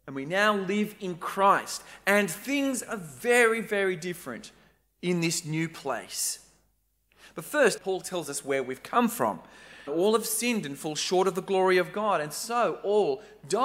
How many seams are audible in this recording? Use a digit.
2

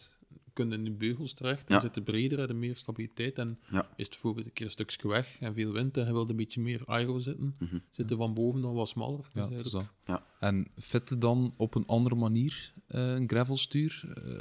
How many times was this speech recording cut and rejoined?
0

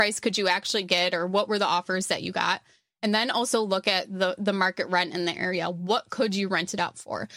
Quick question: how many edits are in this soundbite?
0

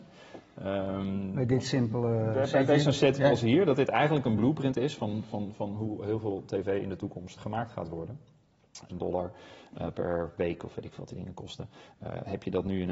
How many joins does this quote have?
2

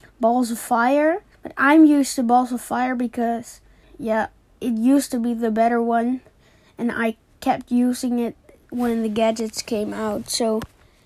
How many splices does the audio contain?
2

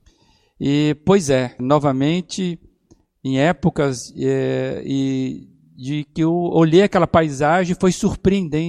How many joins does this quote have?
1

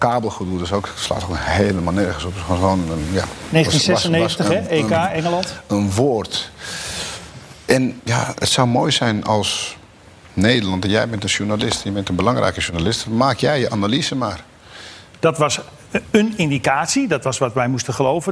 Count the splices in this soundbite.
2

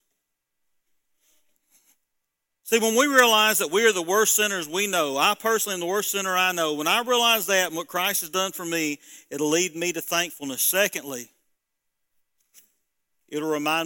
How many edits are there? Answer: 0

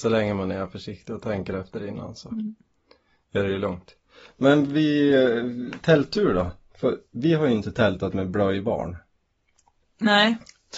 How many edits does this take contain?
0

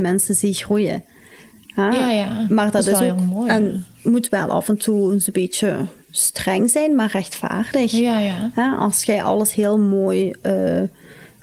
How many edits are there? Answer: 0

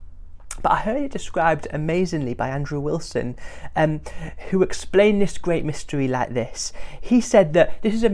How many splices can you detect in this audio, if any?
0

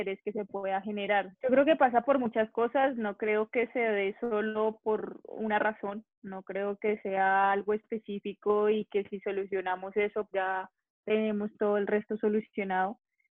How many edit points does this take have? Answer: 2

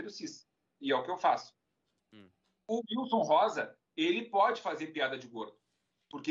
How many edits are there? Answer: 0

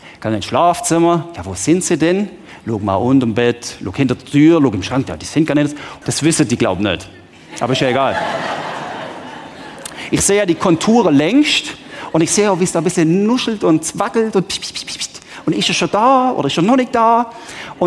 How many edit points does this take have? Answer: 1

